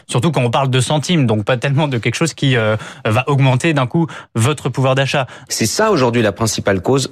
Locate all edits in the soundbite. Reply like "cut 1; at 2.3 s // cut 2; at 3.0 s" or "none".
cut 1; at 5.5 s